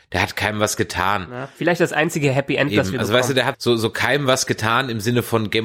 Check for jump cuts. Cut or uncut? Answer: cut